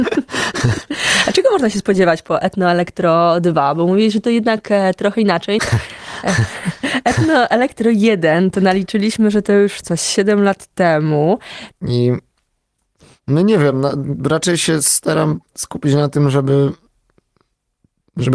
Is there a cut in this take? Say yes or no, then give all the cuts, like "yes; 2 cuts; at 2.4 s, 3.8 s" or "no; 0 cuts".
yes; 2 cuts; at 5.6 s, 11.7 s